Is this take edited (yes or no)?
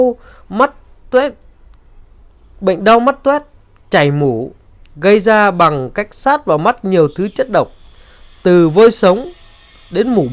no